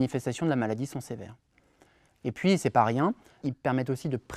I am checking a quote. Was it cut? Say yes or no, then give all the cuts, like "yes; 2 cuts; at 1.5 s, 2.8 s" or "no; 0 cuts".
yes; 2 cuts; at 2.1 s, 3.4 s